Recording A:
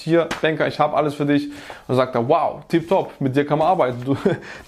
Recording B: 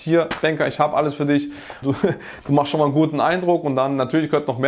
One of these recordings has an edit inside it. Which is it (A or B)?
B